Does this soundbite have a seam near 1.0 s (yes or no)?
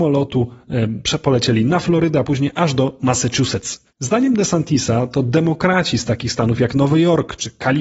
no